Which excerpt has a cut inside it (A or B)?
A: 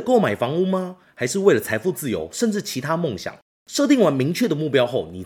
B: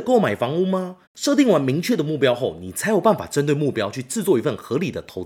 B